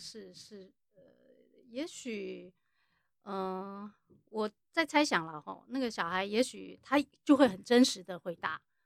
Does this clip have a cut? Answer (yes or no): no